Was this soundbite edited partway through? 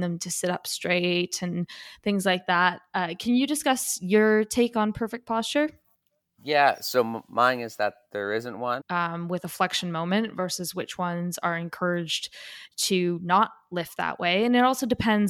yes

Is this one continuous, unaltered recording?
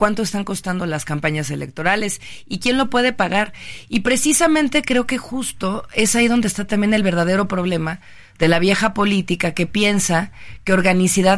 yes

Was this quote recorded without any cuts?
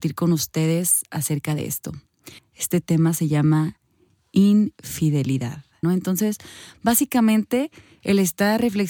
no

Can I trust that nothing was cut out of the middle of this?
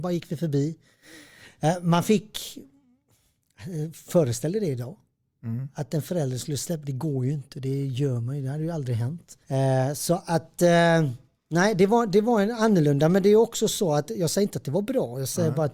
no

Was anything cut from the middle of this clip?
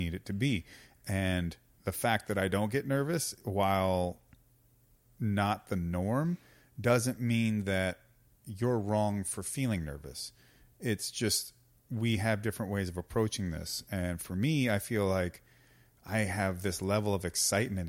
no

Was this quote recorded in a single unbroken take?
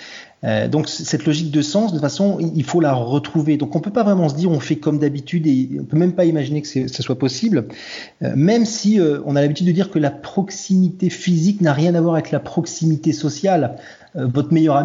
yes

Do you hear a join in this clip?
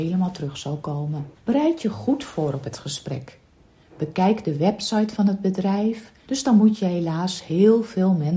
yes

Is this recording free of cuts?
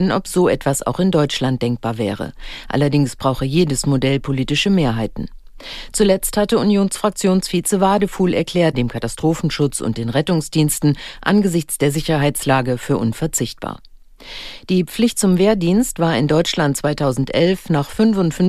no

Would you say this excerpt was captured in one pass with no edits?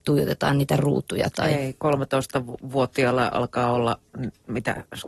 yes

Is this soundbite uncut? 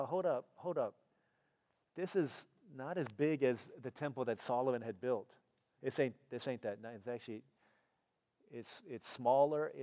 no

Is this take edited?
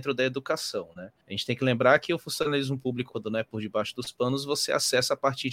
yes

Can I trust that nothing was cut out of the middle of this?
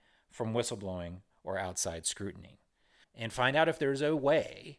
no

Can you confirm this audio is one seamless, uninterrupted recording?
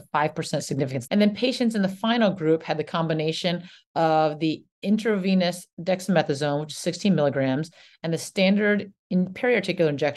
no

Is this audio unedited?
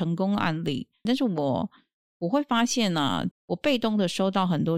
no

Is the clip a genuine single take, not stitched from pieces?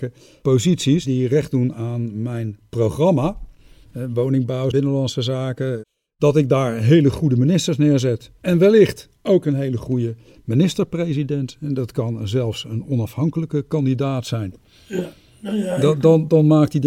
no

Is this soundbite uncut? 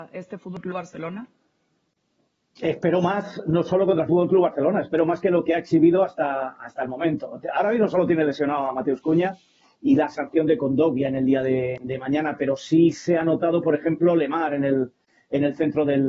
yes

